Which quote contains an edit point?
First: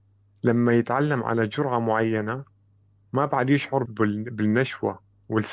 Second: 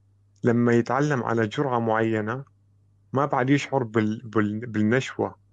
first; 1 cut; at 3.9 s

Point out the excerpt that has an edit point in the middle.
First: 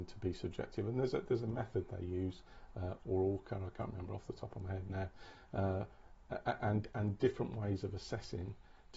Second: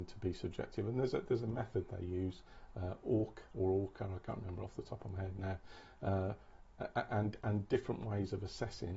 first; 1 cut; at 3.0 s

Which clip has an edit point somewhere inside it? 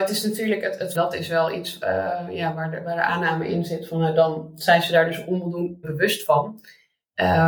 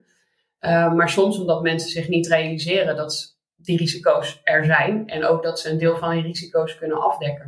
first; 2 cuts; at 0.9 s, 5.8 s

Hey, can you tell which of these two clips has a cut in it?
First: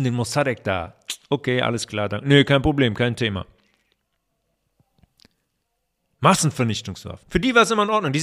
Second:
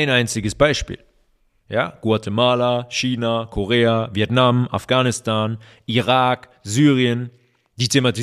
first; 1 cut; at 7.2 s

